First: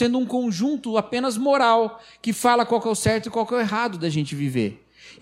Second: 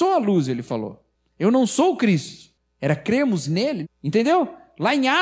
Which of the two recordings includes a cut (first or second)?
second